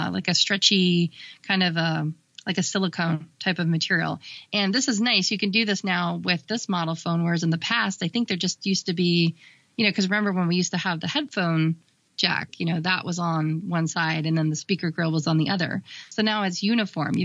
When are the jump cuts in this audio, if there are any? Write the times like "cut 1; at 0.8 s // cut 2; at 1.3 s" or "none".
cut 1; at 4.5 s